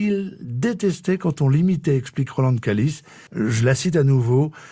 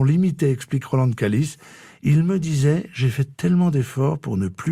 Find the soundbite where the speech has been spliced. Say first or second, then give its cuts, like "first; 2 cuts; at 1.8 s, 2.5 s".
first; 1 cut; at 3.3 s